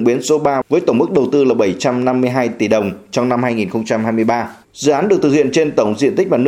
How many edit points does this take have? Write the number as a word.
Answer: one